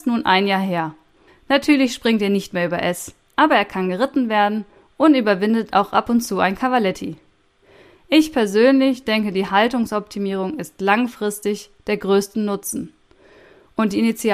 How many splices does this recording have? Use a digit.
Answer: 1